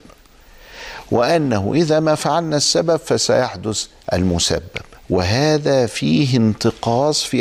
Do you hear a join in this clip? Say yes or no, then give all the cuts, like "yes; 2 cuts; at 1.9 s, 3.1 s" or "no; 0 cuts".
yes; 1 cut; at 5.0 s